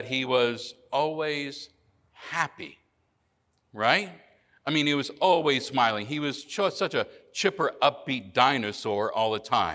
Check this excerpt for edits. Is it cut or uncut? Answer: uncut